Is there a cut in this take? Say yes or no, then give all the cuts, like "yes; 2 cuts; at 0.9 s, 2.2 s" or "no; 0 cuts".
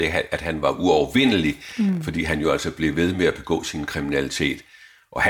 no; 0 cuts